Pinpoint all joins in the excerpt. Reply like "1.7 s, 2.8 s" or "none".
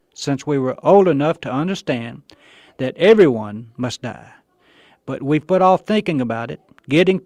none